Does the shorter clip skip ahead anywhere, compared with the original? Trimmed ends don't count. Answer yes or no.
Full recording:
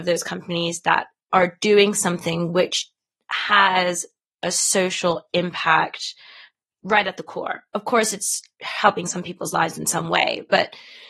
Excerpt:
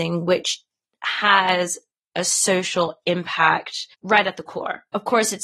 yes